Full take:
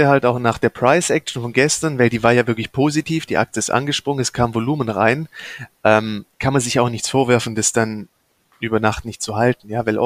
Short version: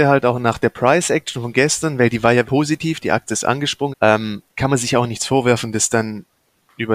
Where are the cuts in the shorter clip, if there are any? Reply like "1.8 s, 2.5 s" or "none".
2.4 s, 3.9 s